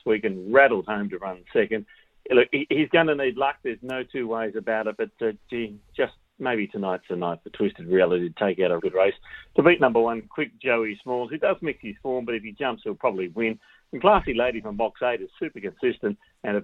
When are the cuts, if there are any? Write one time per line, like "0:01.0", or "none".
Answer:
0:08.8